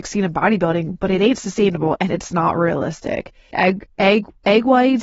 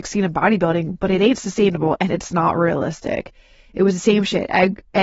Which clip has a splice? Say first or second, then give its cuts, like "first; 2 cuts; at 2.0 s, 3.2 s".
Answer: first; 1 cut; at 3.5 s